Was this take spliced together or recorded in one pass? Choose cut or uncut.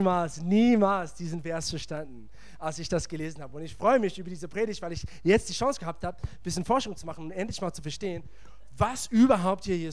uncut